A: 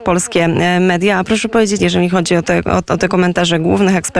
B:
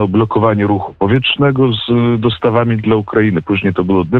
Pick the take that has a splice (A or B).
A